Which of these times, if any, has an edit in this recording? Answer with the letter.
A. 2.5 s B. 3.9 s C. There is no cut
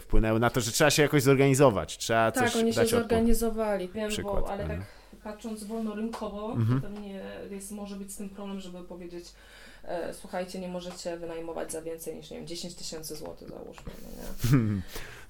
B